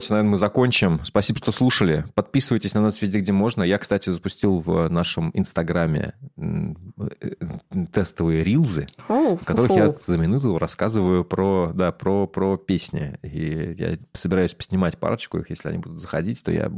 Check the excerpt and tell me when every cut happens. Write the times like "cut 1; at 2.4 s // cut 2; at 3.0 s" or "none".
none